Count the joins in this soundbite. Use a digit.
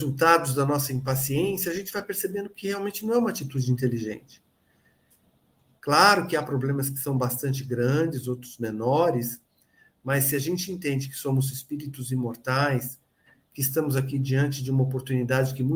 1